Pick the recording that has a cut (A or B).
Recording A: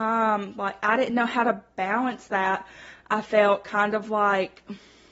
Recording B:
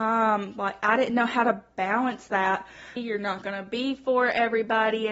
B